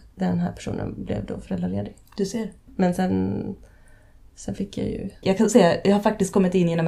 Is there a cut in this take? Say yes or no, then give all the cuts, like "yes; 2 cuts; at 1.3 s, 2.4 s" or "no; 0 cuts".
yes; 2 cuts; at 2.7 s, 5.2 s